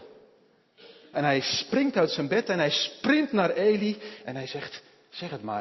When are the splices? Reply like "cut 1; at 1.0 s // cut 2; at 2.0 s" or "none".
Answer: cut 1; at 1.1 s